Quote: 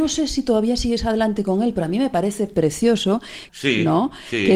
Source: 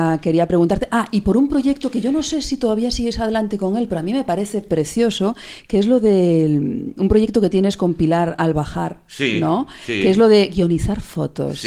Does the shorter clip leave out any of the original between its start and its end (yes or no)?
yes